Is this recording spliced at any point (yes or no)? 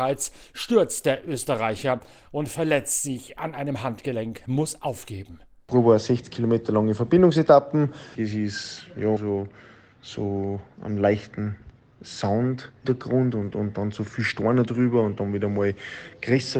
yes